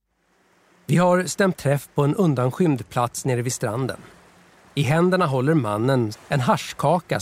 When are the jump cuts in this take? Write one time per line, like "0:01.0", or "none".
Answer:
0:06.1